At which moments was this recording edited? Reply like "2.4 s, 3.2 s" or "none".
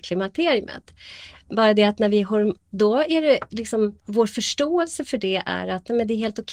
2.6 s, 4.0 s